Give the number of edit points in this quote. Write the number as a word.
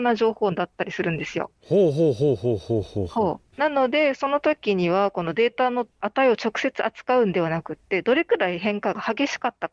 one